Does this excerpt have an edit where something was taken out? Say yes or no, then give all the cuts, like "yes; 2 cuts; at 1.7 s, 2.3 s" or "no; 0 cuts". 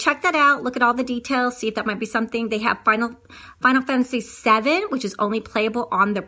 no; 0 cuts